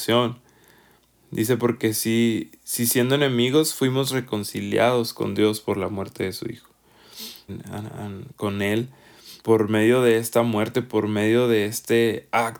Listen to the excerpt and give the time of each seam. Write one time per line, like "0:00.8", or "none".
0:07.5
0:09.4